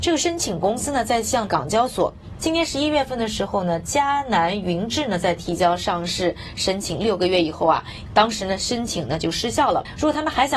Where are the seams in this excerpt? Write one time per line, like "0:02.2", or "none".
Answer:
0:02.4
0:08.1